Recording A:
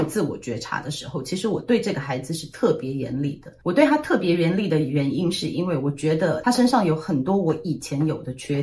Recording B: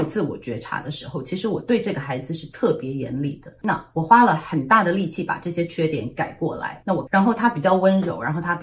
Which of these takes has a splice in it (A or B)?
B